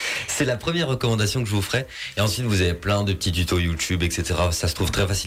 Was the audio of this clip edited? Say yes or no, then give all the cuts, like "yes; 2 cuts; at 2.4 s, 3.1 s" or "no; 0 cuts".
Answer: no; 0 cuts